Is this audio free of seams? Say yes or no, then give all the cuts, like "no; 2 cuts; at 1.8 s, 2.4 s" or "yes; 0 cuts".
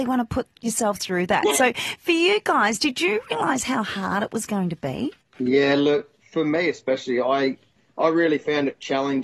yes; 0 cuts